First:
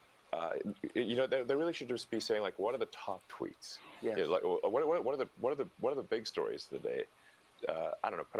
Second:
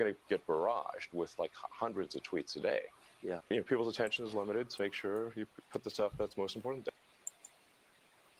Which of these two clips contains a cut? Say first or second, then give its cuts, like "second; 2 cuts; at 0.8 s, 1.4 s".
second; 2 cuts; at 3.4 s, 4.8 s